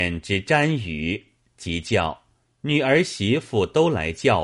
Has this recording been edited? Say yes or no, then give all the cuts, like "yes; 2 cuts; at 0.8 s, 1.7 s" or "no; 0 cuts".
yes; 1 cut; at 2.4 s